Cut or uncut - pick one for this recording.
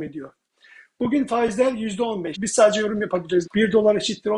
cut